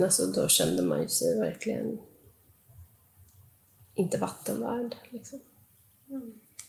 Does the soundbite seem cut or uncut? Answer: uncut